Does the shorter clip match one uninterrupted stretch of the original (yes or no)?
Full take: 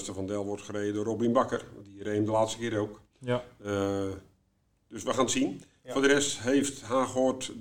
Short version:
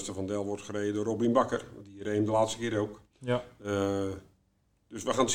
yes